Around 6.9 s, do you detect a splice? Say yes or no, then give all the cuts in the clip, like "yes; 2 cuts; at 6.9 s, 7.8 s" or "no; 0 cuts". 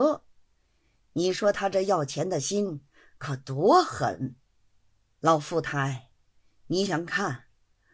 yes; 2 cuts; at 5.0 s, 6.9 s